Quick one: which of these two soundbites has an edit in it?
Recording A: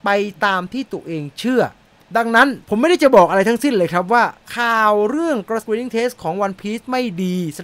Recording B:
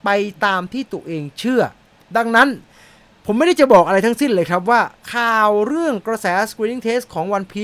A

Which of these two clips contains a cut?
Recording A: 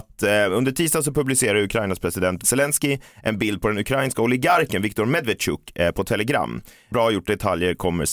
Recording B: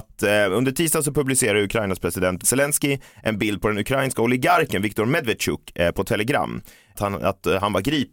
A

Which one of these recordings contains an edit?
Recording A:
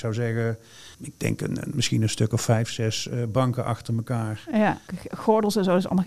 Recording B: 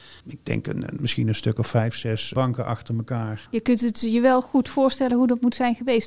B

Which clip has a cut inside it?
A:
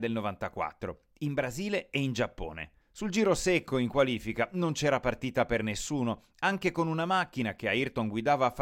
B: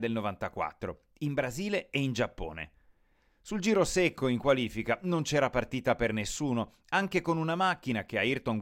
A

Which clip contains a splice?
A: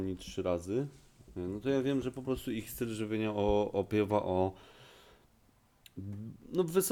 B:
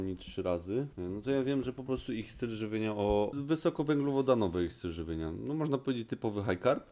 B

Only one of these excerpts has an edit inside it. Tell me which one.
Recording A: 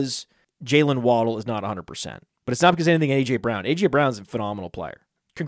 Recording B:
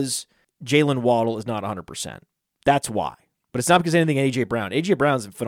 A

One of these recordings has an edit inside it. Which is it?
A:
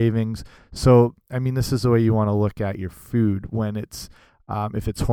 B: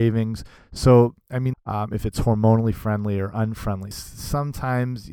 B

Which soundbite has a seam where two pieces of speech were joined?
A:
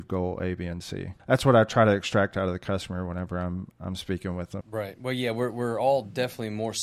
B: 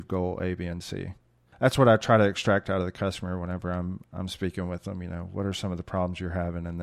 A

